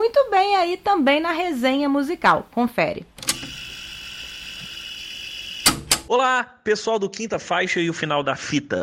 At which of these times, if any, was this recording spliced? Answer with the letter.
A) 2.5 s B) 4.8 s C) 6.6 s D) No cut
D